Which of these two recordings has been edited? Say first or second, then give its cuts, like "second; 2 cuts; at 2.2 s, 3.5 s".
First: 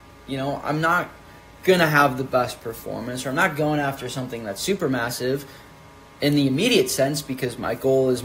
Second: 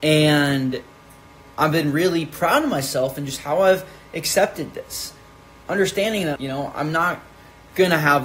second; 1 cut; at 6.4 s